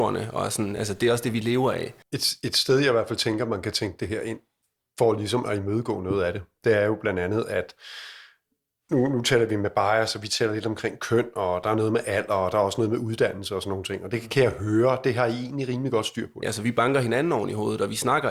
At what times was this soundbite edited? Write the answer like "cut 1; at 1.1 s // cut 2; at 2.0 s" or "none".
cut 1; at 2.0 s // cut 2; at 16.4 s

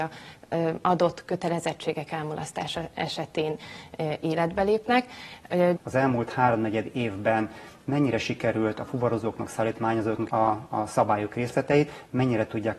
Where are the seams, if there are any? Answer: cut 1; at 5.8 s // cut 2; at 10.3 s

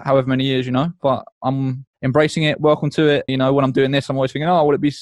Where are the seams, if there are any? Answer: cut 1; at 1.9 s // cut 2; at 3.3 s

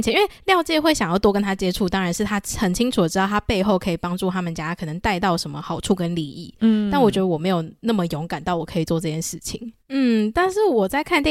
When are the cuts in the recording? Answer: cut 1; at 9.8 s

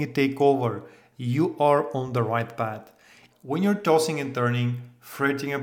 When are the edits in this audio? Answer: cut 1; at 3.3 s

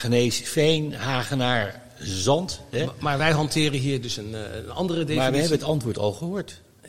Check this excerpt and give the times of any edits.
none

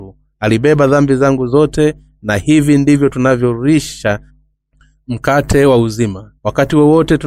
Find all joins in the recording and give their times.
cut 1; at 6.4 s

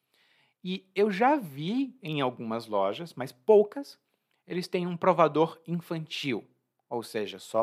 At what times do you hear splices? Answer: none

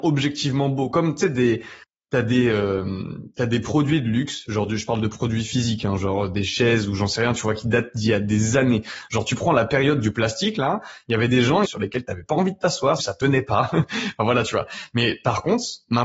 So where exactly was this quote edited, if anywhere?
cut 1; at 11.6 s // cut 2; at 13.0 s

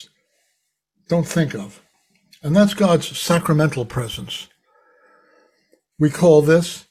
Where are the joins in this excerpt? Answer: cut 1; at 5.9 s

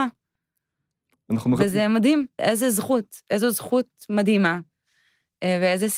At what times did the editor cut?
cut 1; at 2.4 s

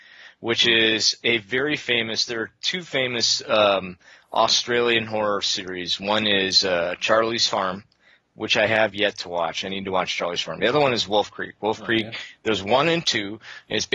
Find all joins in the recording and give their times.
none

